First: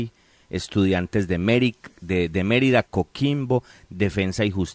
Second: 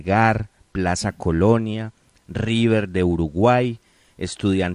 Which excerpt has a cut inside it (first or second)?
first